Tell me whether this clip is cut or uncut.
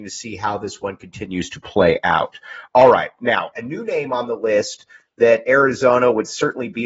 cut